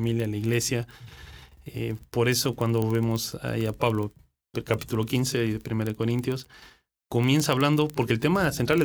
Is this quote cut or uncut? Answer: uncut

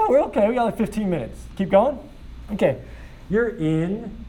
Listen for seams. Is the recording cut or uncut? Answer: cut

